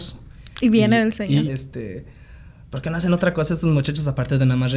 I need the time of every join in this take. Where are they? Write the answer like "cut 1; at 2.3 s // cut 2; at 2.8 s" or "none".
cut 1; at 1.5 s